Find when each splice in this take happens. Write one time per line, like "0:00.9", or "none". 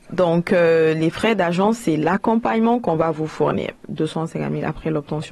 0:03.8